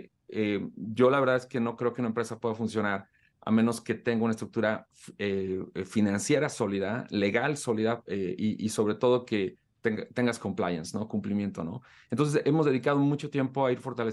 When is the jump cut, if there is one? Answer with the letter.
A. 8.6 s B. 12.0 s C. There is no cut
C